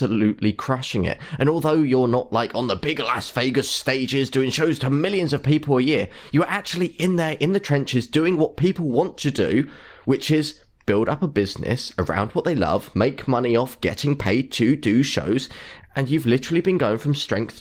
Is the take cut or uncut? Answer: uncut